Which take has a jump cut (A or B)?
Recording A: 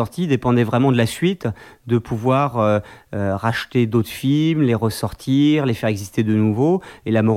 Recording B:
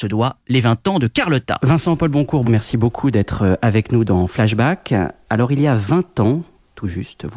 B